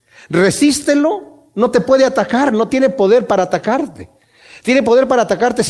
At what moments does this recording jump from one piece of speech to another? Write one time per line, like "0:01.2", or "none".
none